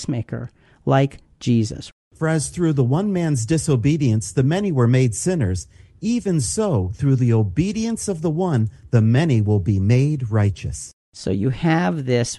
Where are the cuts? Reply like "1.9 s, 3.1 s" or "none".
2.0 s